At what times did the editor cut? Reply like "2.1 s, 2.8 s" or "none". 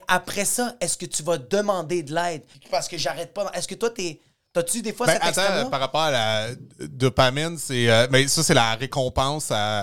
2.5 s

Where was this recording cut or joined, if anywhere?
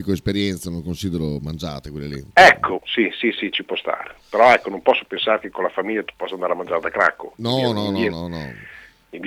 2.8 s

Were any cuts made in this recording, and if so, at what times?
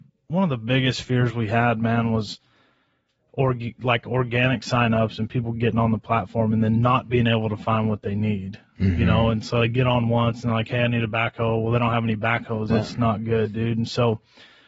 12.7 s

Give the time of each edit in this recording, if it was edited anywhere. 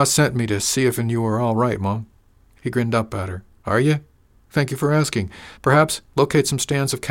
4.4 s, 5.6 s

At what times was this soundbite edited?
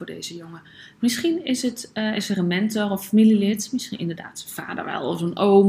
none

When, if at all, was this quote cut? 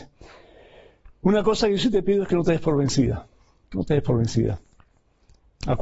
none

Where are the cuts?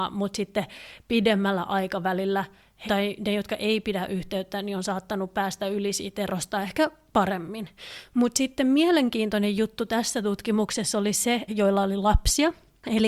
2.9 s, 11.5 s

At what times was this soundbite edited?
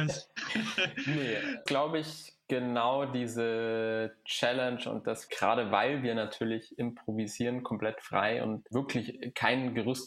1.7 s, 5.3 s

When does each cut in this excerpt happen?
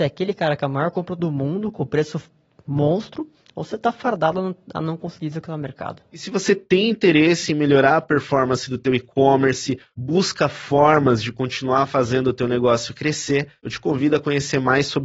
none

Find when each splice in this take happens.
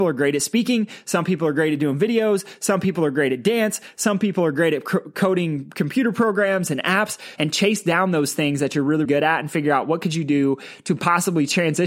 7.4 s, 9.1 s

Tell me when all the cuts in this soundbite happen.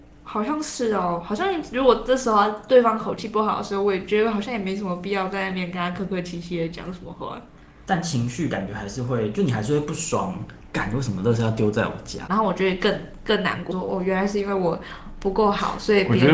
12.3 s, 13.7 s

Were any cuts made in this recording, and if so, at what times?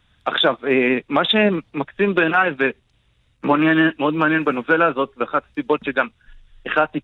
none

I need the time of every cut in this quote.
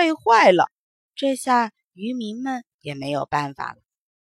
1.1 s

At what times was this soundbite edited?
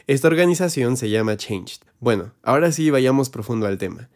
1.9 s

